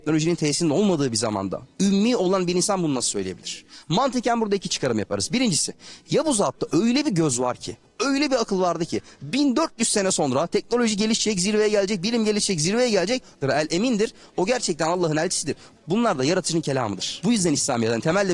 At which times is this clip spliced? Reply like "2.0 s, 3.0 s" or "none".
13.4 s, 15.7 s